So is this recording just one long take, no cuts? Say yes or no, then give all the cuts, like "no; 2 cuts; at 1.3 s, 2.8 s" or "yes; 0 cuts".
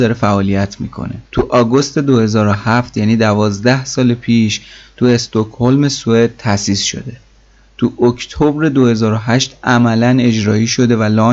no; 1 cut; at 1.3 s